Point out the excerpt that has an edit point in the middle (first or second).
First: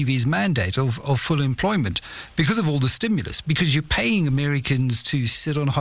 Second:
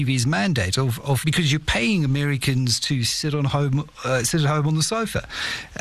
second